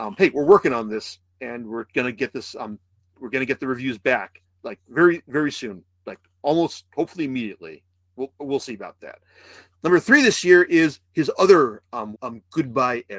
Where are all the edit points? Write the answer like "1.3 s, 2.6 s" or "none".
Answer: 9.7 s, 12.1 s